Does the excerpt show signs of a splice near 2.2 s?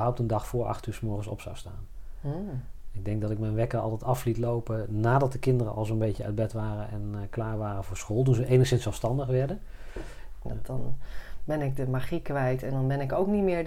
no; 1 cut; at 10.4 s

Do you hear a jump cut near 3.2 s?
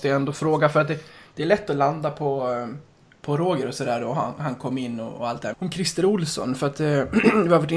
no; 1 cut; at 5.5 s

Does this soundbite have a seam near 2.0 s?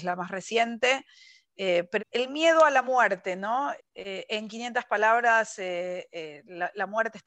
yes; 2 cuts; at 2.0 s, 3.8 s

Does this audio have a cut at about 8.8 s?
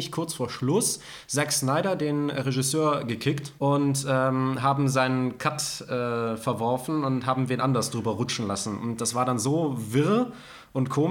no; 1 cut; at 3.6 s

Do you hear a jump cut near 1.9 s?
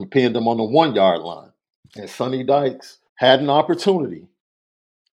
yes; 2 cuts; at 1.9 s, 3.1 s

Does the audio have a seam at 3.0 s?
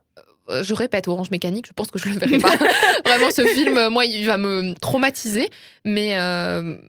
no; 0 cuts

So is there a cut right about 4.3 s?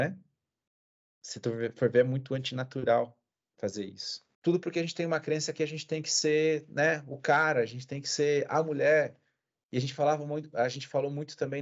yes; 1 cut; at 4.3 s

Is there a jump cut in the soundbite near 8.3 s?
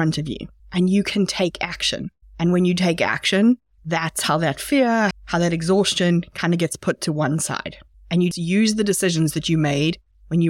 yes; 2 cuts; at 5.1 s, 8.3 s

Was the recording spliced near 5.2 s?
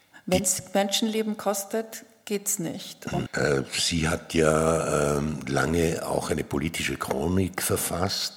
no; 1 cut; at 3.3 s

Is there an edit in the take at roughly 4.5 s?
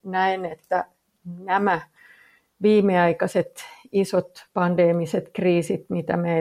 yes; 1 cut; at 4.5 s

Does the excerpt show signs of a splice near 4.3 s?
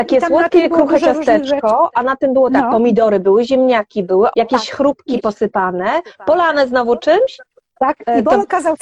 yes; 1 cut; at 4.3 s

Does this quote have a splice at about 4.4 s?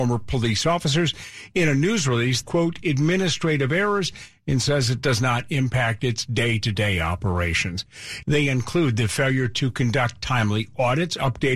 no; 2 cuts; at 2.4 s, 8.2 s

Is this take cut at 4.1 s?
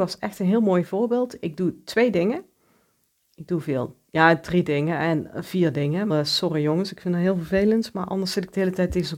no; 1 cut; at 6.1 s

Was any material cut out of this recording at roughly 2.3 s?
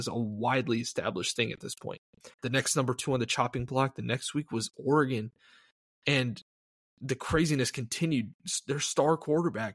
yes; 1 cut; at 2.3 s

